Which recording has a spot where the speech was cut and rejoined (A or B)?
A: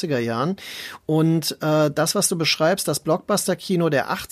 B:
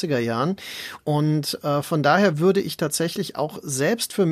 B